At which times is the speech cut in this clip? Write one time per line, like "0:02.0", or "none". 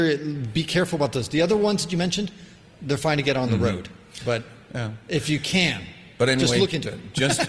none